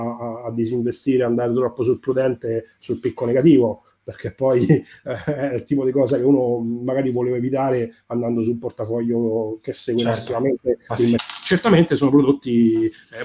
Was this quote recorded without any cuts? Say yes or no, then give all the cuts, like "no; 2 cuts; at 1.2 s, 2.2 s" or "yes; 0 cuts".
no; 1 cut; at 11.2 s